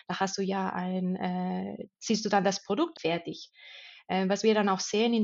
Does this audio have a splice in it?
yes; 1 cut; at 2.9 s

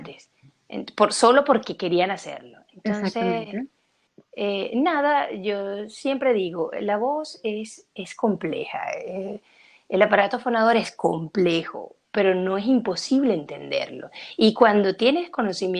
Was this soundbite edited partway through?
yes; 1 cut; at 12.0 s

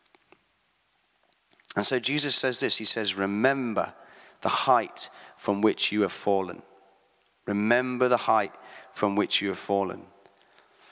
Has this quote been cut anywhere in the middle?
no; 0 cuts

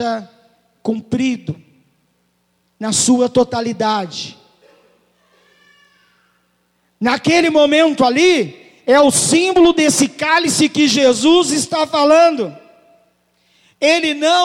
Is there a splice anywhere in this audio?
no; 0 cuts

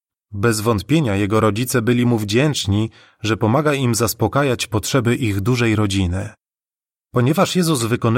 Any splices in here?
no; 0 cuts

